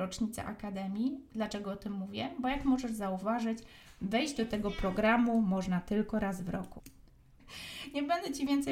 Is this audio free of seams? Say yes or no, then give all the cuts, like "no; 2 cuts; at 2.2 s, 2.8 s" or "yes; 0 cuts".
no; 1 cut; at 7.4 s